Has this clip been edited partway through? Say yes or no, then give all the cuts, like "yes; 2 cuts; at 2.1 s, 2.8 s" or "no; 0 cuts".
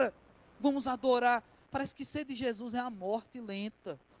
yes; 1 cut; at 1.7 s